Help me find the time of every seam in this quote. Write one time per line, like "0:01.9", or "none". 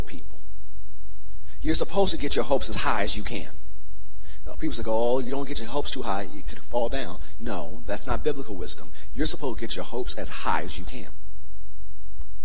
none